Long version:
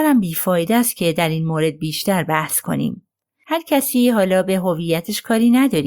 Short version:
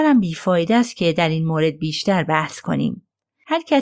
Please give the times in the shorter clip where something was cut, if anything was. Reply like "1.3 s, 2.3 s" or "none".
none